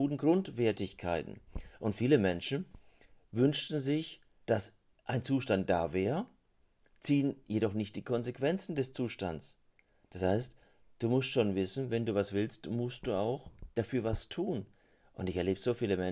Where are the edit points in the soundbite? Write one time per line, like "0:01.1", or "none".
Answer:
none